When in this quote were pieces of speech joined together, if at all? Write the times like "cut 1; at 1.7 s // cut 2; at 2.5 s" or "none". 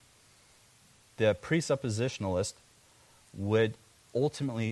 none